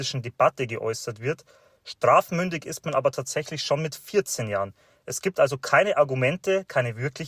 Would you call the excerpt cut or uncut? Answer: uncut